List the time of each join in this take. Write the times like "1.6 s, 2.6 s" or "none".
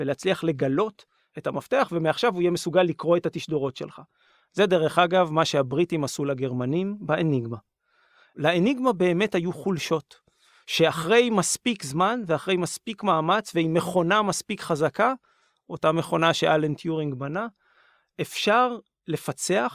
none

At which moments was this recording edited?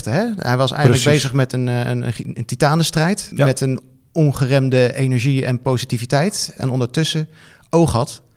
3.3 s, 6.6 s

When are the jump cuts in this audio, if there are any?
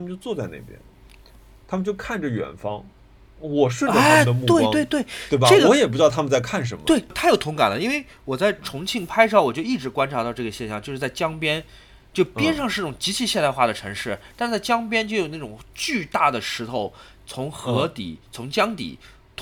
none

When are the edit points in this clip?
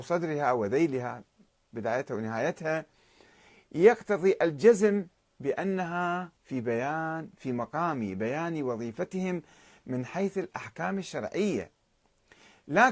6.4 s

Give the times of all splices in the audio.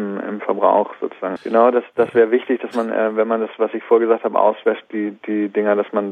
1.4 s

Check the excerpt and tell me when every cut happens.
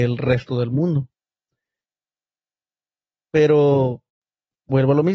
none

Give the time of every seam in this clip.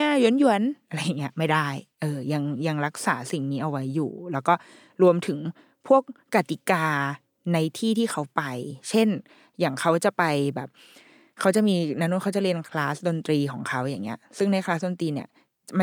none

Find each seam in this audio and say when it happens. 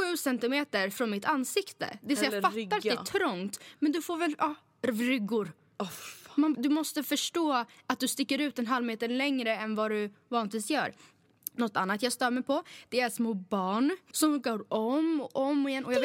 6.5 s, 14.1 s

